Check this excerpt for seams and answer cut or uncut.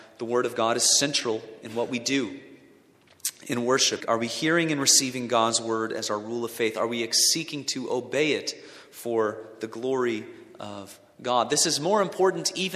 cut